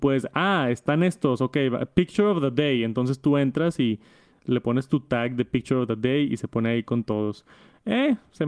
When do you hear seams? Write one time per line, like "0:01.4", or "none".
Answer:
none